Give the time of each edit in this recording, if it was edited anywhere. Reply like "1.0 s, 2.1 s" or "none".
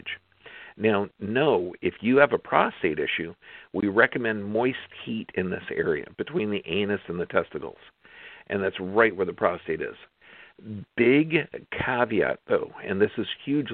none